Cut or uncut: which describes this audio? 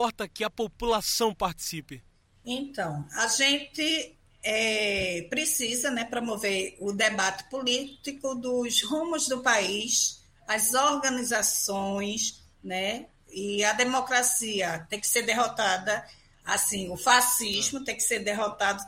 uncut